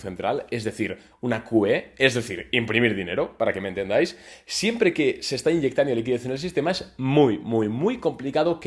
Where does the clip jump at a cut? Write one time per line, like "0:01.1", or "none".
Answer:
none